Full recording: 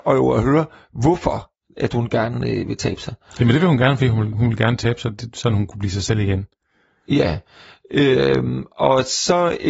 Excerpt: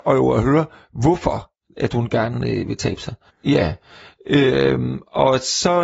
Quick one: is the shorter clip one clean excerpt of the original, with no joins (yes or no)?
no